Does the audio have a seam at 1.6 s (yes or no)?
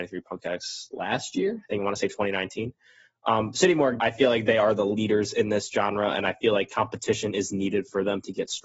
no